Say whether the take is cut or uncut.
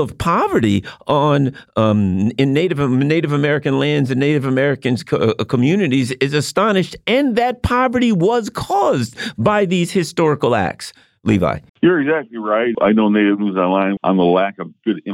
cut